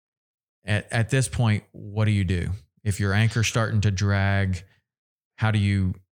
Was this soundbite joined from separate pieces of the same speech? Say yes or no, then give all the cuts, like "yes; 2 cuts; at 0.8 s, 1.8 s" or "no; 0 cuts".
no; 0 cuts